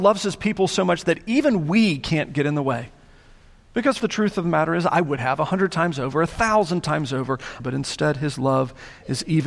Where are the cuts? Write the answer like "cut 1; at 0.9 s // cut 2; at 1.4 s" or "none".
cut 1; at 4.0 s // cut 2; at 7.6 s